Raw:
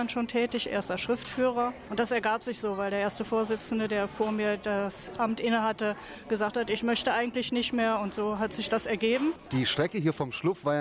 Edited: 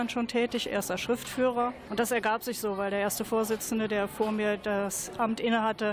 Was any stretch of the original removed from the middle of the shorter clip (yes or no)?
no